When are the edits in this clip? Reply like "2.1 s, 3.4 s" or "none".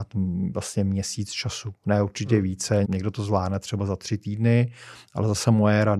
2.8 s